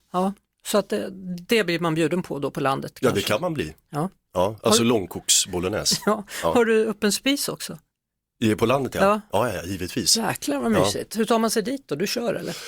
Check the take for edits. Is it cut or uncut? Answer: uncut